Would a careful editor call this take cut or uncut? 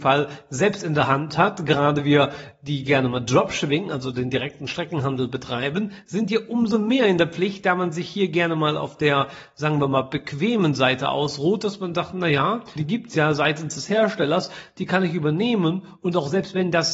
cut